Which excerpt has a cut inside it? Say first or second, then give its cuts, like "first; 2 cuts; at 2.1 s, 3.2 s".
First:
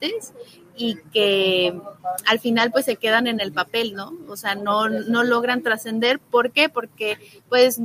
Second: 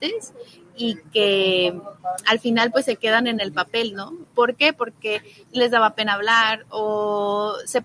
second; 2 cuts; at 4.2 s, 5.5 s